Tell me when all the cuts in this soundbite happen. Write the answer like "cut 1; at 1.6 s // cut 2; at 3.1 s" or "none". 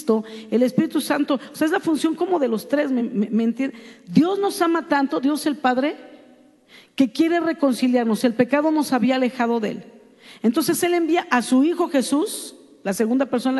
none